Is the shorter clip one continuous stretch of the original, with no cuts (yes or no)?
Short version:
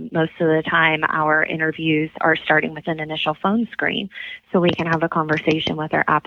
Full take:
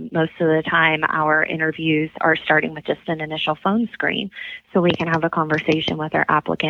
no